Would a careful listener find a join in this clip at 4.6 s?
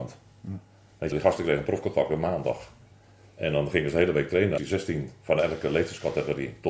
yes; 2 cuts; at 1.1 s, 4.6 s

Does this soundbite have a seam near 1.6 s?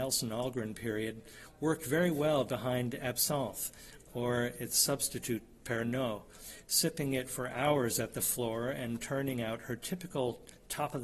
no; 0 cuts

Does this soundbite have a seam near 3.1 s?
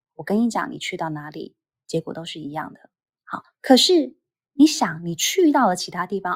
yes; 1 cut; at 3.1 s

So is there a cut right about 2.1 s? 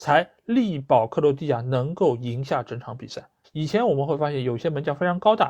no; 1 cut; at 3.4 s

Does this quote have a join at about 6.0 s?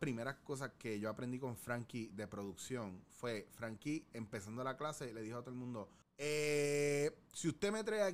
yes; 1 cut; at 6.0 s

